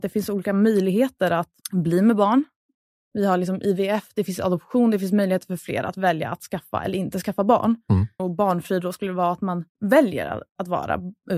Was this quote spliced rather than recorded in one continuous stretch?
yes; 3 cuts; at 1.6 s, 8.2 s, 9.7 s

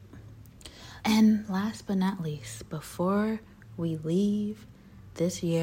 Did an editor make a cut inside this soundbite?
yes; 1 cut; at 1.0 s

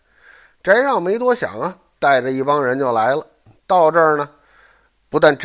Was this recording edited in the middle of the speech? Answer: no; 0 cuts

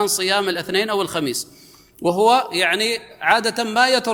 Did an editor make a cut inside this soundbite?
no; 0 cuts

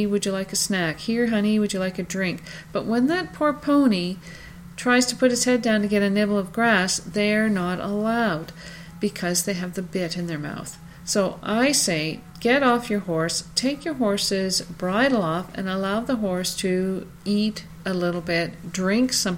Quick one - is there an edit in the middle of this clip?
no; 0 cuts

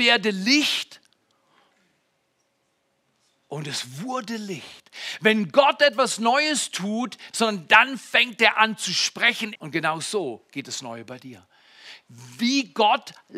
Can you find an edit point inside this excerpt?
yes; 2 cuts; at 7.3 s, 9.6 s

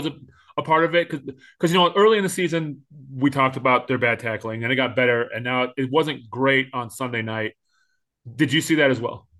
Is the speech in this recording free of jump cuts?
yes; 0 cuts

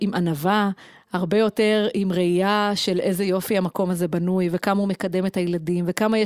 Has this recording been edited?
no; 0 cuts

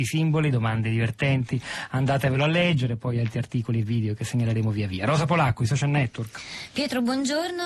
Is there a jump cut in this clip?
no; 0 cuts

